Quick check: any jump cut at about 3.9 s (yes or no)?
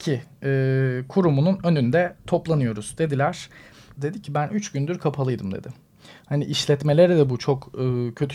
yes